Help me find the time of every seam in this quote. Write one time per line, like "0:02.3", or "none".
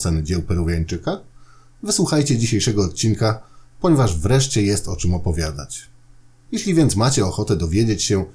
0:06.5